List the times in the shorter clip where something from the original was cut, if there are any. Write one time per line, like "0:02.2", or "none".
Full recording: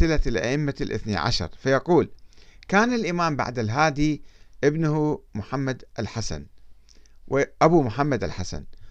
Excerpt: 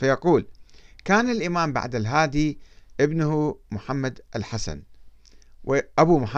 none